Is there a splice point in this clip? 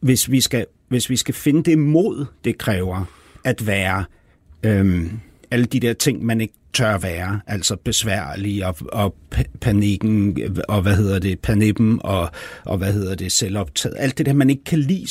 yes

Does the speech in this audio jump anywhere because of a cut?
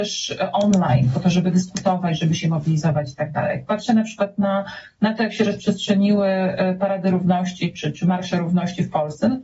no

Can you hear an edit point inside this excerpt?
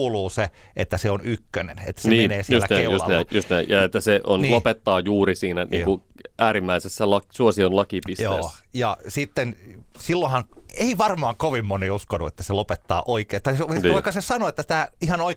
no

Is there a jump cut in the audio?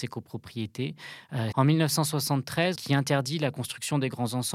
yes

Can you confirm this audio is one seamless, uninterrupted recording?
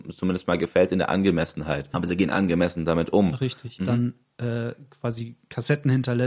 no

